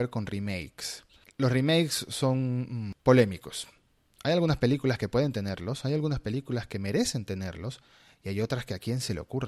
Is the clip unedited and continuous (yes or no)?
yes